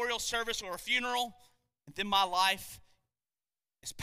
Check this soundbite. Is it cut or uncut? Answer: uncut